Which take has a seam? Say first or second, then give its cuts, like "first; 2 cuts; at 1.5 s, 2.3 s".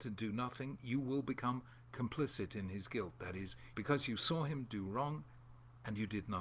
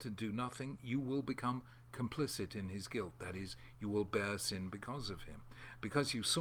first; 1 cut; at 3.7 s